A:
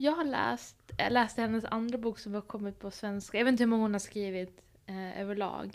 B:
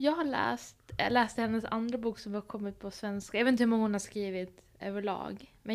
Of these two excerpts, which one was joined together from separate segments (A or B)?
B